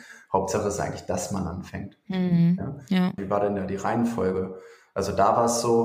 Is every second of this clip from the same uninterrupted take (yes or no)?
no